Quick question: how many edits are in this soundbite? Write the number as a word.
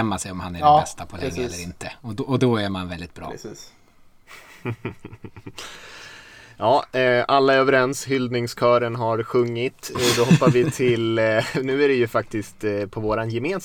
zero